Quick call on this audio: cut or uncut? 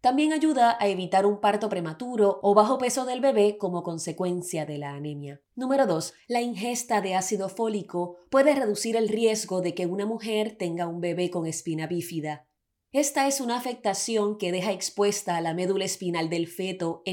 cut